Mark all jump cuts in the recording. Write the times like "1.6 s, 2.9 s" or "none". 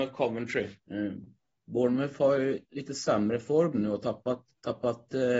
4.5 s